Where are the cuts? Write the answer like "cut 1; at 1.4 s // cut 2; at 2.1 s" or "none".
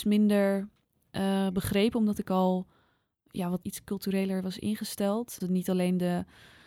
cut 1; at 3.6 s // cut 2; at 5.4 s